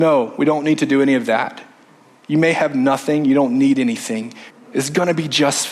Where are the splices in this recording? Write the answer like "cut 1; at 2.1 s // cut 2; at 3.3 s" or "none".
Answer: cut 1; at 4.5 s